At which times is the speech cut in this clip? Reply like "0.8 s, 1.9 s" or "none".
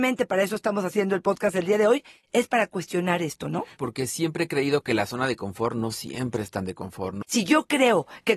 3.8 s, 7.2 s